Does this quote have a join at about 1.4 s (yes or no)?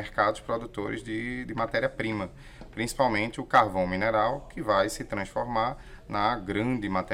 no